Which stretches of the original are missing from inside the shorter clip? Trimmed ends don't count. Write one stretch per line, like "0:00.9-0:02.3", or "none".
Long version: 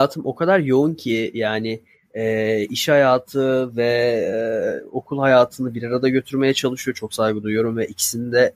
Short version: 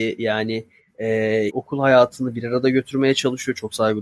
0:02.7-0:04.9